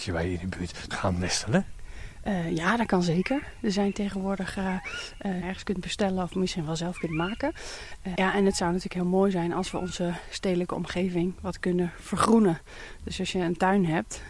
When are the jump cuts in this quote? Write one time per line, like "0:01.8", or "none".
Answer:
0:00.9
0:05.4
0:08.2